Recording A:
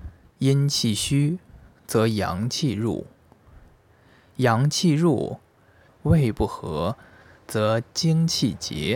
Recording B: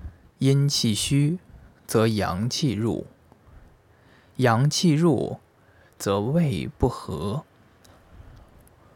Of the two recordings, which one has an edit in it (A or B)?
A